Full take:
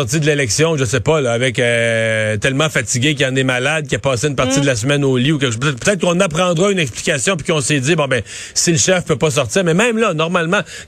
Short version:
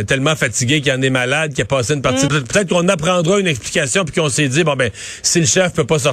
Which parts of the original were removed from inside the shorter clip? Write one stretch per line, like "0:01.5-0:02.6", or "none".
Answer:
0:04.6-0:05.6